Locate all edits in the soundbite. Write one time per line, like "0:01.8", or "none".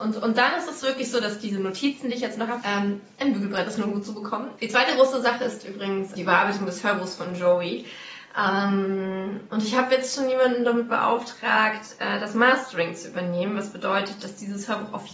0:02.6
0:04.6
0:06.2